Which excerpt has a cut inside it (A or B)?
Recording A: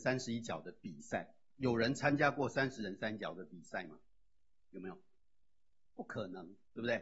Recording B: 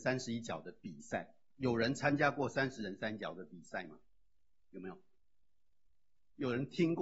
A